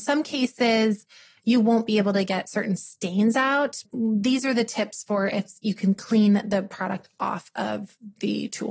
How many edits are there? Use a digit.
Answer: 1